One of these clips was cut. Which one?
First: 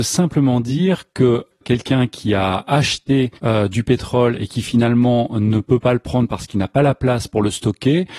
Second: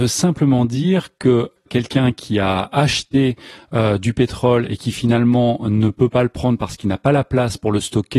first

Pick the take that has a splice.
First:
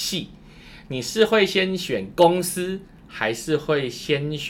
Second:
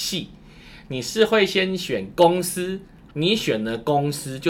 second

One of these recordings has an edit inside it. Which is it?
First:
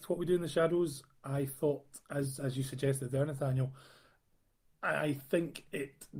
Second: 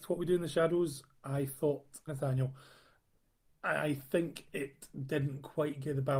second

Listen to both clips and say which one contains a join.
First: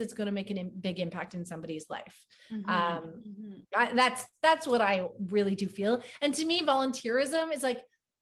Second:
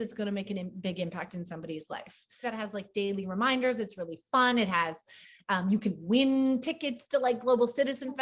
second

